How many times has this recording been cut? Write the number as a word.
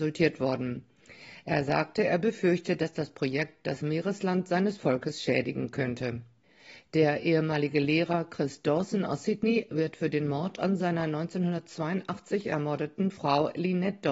zero